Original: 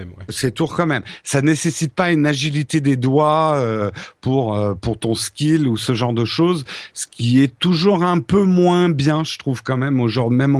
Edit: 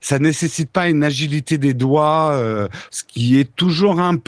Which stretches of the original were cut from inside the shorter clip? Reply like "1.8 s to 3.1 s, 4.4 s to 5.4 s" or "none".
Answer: 4.1 s to 6.9 s